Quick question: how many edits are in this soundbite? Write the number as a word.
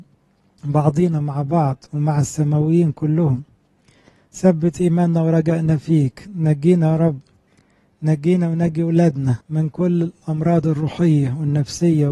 one